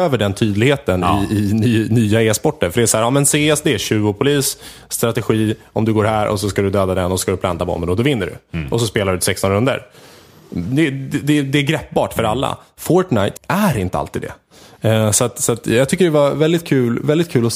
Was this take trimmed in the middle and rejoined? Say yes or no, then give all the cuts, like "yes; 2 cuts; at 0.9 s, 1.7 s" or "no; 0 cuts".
yes; 1 cut; at 13.4 s